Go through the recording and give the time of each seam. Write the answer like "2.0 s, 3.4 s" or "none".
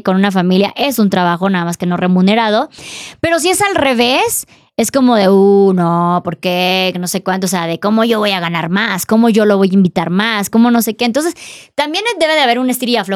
none